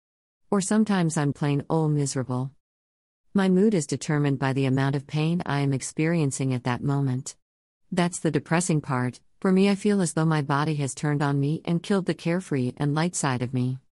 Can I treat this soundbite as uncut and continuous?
no; 1 cut; at 1.3 s

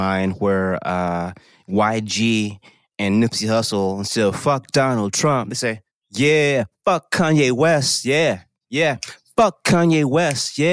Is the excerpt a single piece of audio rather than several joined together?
yes; 0 cuts

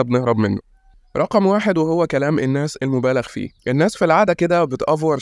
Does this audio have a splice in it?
yes; 1 cut; at 3.6 s

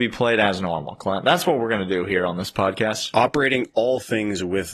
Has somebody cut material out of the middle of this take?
no; 0 cuts

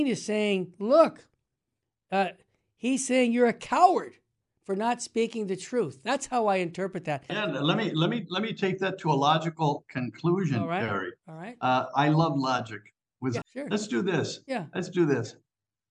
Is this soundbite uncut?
no; 2 cuts; at 7.3 s, 13.4 s

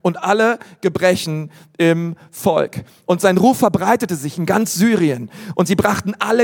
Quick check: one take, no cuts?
yes; 0 cuts

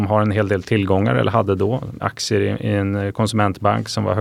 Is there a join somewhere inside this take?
yes; 1 cut; at 2.0 s

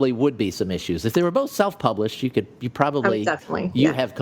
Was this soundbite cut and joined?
no; 0 cuts

